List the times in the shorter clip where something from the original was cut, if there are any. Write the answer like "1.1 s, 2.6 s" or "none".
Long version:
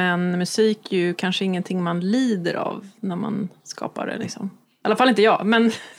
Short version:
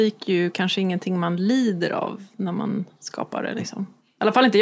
none